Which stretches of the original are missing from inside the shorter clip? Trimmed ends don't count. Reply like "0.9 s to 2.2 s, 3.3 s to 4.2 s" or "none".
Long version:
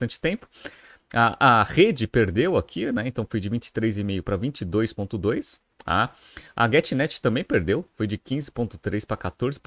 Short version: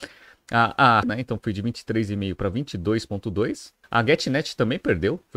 1.7 s to 2.9 s, 5.7 s to 6.5 s